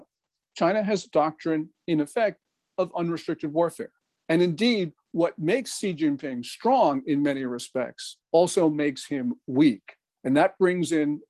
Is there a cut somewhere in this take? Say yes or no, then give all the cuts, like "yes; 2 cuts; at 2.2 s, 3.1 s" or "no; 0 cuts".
yes; 2 cuts; at 4.2 s, 8.2 s